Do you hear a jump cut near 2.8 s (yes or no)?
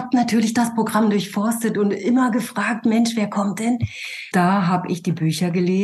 no